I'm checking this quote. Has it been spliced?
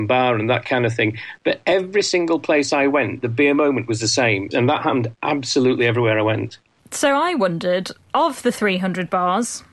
yes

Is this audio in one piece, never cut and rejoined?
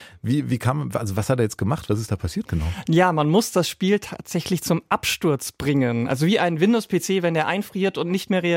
yes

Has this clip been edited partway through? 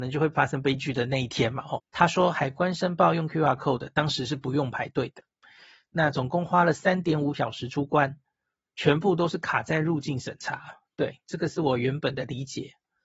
yes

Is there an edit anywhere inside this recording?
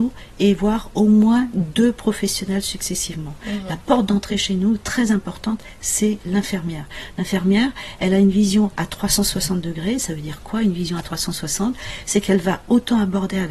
no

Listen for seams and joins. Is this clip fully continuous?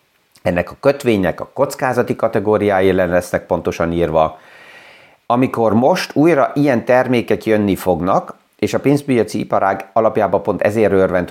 no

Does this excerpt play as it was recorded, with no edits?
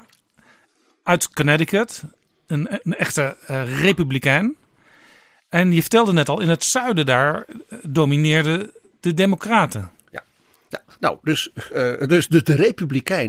yes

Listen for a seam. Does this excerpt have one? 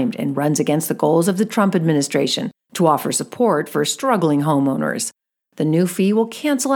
no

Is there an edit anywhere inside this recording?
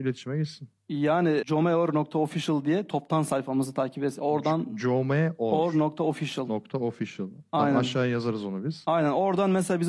yes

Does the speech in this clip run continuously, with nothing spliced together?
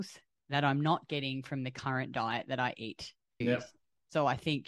no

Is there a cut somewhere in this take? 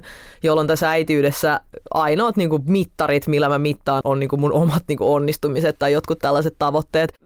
yes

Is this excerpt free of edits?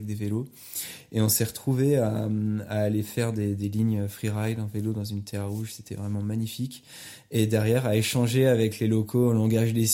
yes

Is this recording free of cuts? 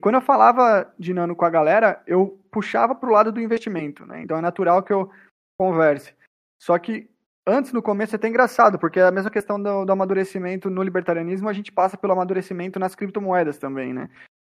no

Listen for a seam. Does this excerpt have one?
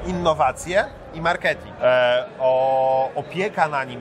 yes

